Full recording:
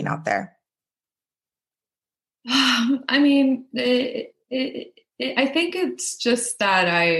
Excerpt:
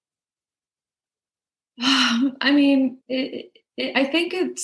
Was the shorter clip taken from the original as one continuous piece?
no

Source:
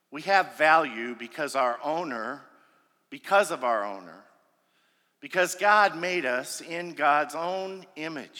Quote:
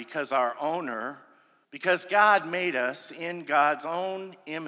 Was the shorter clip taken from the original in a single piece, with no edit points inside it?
no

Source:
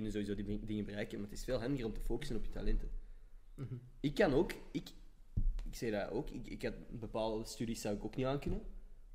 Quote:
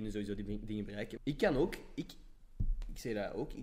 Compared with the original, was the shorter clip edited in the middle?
yes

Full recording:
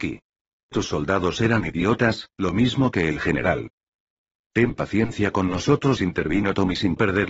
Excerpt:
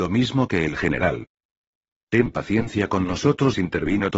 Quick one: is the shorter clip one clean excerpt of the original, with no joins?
yes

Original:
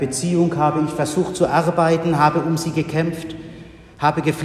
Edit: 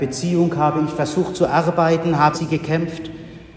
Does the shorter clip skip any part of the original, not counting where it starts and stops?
yes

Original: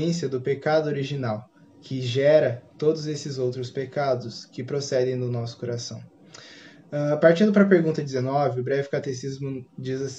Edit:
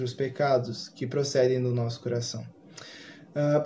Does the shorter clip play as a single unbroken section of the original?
yes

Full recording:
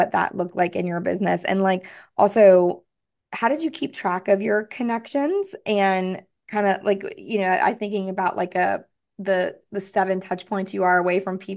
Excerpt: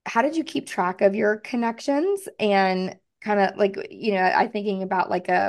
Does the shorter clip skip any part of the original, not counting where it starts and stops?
no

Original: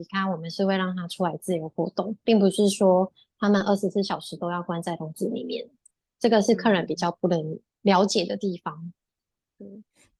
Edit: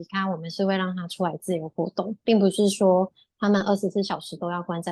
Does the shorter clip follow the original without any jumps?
yes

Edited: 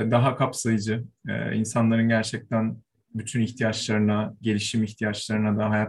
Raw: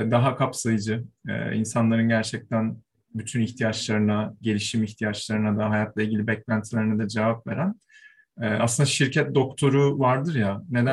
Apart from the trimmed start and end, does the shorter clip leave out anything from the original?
no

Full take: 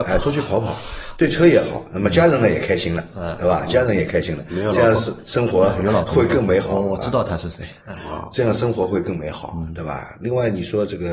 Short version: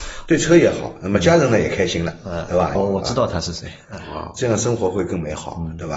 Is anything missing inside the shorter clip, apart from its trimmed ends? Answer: yes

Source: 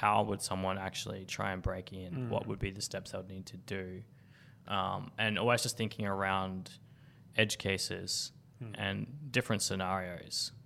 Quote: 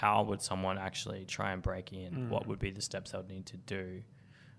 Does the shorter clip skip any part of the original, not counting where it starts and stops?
no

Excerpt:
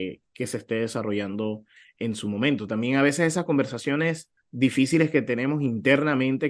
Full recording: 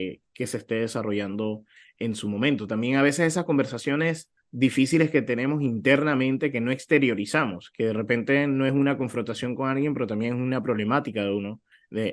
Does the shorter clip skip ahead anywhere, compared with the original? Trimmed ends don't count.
no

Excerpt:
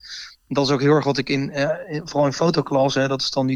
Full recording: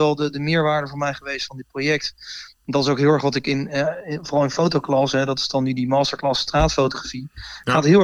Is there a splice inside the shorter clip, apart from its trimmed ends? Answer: no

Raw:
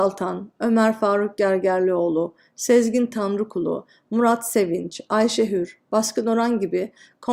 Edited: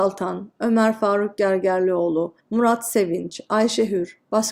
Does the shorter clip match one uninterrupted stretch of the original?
no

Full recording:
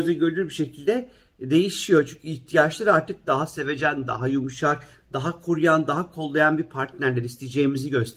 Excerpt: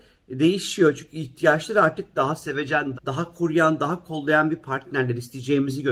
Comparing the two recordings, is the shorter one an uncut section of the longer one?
no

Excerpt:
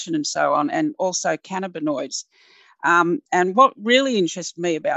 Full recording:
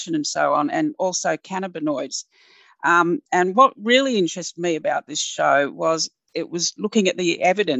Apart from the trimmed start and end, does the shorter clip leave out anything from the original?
no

